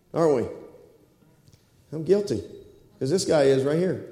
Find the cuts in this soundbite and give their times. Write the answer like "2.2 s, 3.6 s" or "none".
2.9 s